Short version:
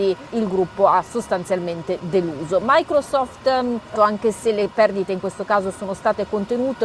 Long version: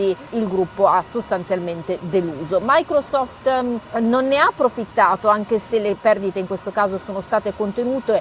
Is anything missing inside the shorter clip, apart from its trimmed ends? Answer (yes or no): yes